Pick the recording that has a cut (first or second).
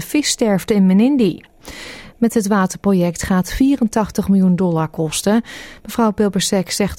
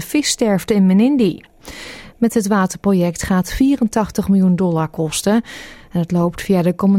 first